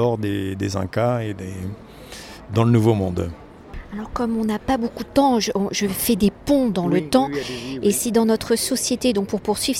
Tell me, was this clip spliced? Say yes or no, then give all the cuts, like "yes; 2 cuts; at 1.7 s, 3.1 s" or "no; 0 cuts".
no; 0 cuts